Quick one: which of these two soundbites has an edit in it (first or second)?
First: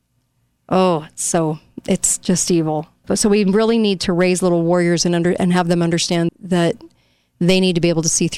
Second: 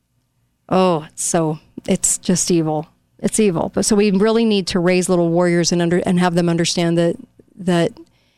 first